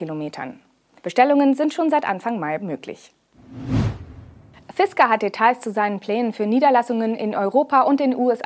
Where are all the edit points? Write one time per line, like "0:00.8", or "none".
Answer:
0:01.0